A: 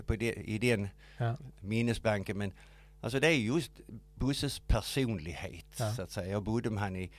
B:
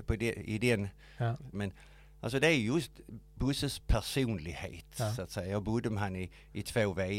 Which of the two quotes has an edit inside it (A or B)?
B